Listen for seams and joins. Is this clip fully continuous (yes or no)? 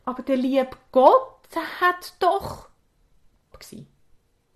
no